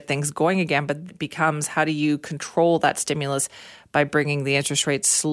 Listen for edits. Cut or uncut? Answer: cut